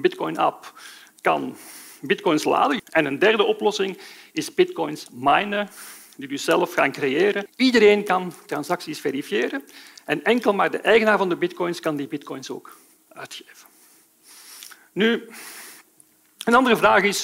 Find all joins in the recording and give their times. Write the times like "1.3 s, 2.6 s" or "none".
2.8 s, 7.5 s